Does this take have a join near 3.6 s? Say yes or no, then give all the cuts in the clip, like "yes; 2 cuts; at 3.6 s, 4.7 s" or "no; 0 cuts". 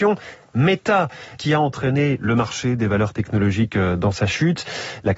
no; 1 cut; at 1.4 s